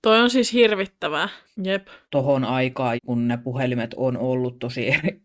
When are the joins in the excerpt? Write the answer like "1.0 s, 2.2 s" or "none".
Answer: 1.5 s, 3.0 s